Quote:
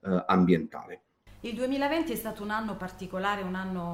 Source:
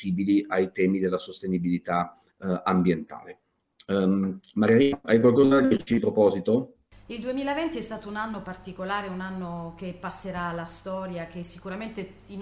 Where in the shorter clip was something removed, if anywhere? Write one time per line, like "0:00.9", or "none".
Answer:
0:01.3